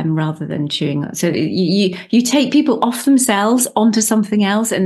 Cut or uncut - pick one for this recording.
uncut